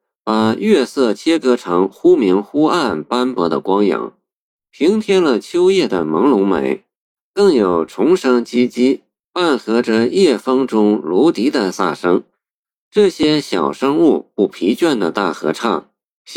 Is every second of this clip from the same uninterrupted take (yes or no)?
no